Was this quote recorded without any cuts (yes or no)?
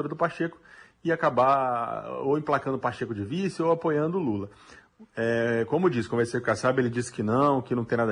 yes